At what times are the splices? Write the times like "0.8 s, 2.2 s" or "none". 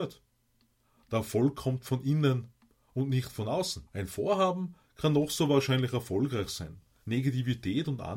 3.9 s, 7.0 s